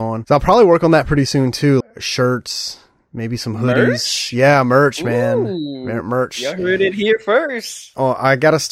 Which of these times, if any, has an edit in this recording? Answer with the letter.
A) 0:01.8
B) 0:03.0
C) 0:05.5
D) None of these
A